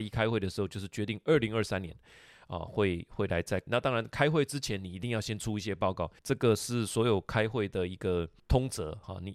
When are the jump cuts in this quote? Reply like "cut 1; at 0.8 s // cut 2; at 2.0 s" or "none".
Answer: cut 1; at 3.7 s // cut 2; at 6.2 s